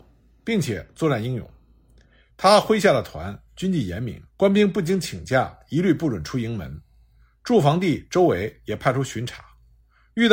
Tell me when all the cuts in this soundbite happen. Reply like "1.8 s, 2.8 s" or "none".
2.3 s, 4.3 s